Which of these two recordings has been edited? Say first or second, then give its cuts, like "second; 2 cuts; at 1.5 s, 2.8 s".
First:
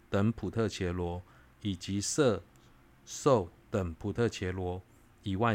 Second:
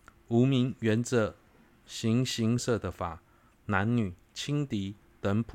second; 1 cut; at 2.6 s